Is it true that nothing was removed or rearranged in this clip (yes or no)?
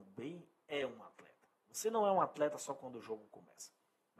yes